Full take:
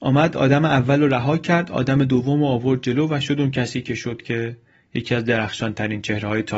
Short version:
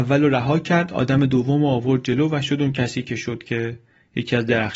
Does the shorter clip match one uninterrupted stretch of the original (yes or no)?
yes